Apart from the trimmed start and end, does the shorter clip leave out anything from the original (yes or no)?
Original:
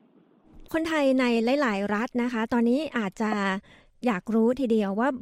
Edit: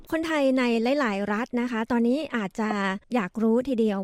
yes